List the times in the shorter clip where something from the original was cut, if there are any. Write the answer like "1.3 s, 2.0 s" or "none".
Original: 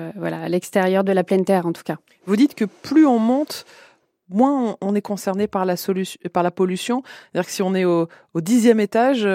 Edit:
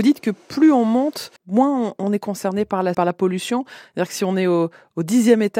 1.4 s, 2.9 s